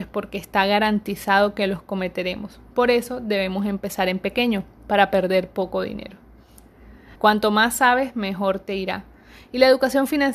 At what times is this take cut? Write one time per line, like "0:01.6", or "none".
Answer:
0:07.2

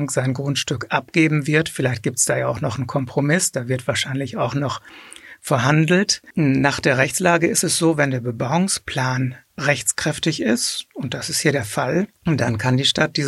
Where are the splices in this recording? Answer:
0:12.1

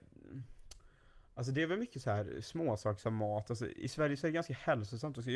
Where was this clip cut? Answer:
0:03.8

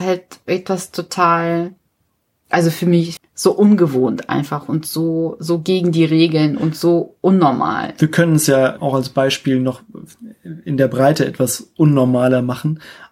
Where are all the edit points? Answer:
0:03.2

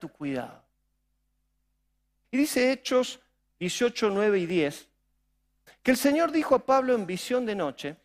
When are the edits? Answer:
0:02.2

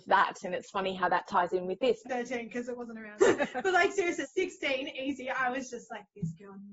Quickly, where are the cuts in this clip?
0:02.0
0:03.2
0:04.2

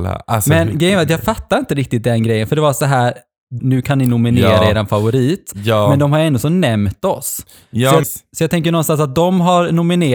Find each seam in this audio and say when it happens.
0:03.6
0:08.0

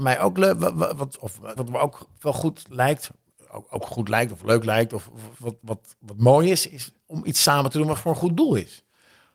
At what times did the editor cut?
0:01.6

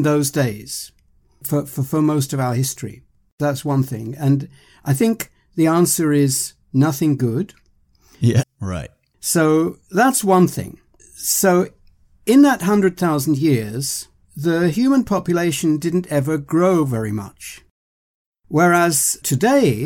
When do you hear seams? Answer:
0:08.4
0:11.0
0:14.2

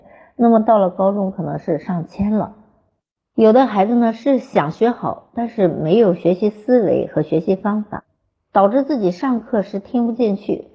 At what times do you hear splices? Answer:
none

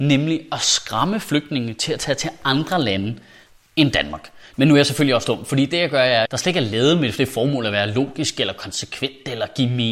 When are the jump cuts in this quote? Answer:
0:04.5
0:06.3

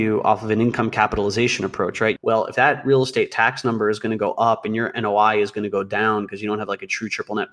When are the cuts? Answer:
0:02.2

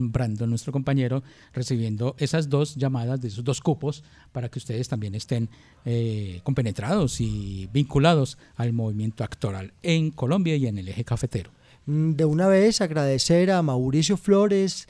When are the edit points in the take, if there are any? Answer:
none

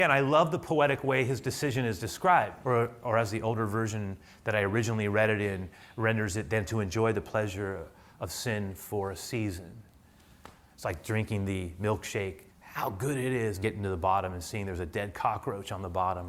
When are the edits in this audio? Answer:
0:02.6
0:12.5
0:13.6

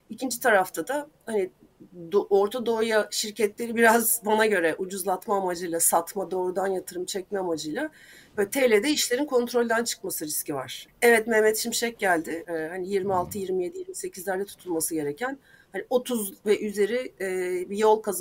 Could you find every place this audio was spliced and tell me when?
0:10.9
0:12.4

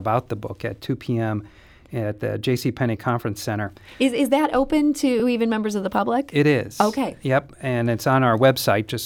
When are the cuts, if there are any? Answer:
none

